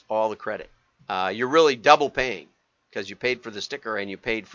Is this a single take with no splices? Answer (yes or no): no